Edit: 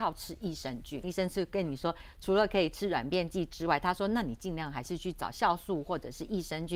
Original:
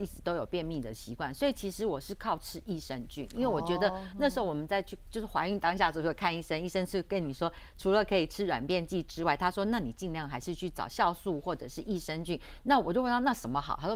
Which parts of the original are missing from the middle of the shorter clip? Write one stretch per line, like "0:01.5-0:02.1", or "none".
0:03.3-0:06.6

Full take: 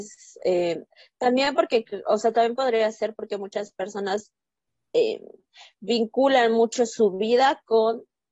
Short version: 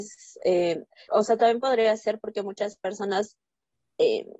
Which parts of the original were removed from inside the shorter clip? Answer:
0:01.1-0:02.0

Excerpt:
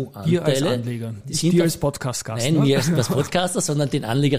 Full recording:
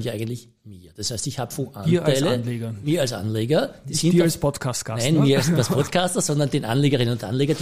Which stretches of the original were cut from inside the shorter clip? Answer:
0:02.8-0:03.8

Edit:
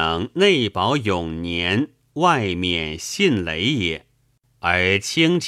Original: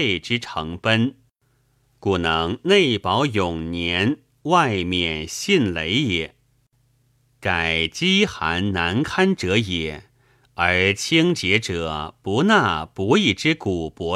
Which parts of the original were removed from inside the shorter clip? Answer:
0:06.8-0:10.5

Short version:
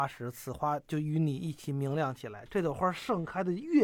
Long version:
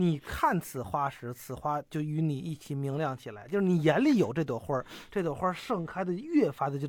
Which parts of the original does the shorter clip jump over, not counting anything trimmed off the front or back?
0:03.5-0:05.1

